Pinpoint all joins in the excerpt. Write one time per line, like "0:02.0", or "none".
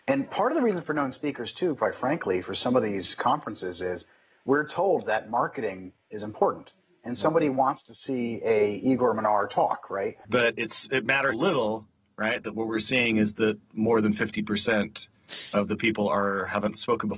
0:10.2
0:11.3